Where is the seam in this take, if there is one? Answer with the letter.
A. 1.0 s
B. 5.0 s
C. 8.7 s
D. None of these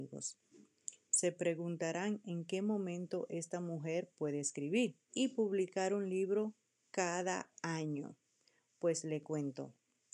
B